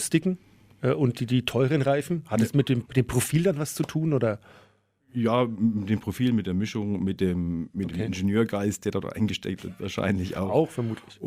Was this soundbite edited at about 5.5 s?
no; 1 cut; at 2.9 s

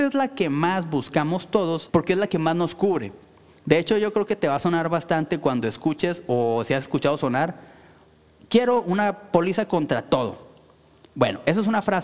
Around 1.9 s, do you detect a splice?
yes; 1 cut; at 1.9 s

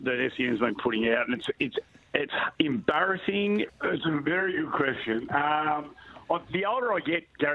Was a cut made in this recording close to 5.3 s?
no; 1 cut; at 3.7 s

